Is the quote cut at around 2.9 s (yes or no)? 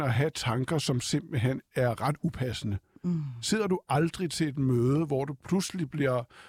no